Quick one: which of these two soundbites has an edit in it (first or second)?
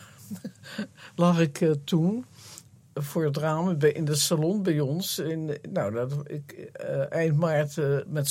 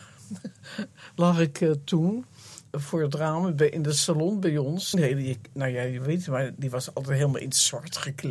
second